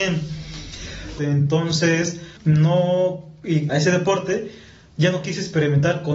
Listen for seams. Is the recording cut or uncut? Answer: cut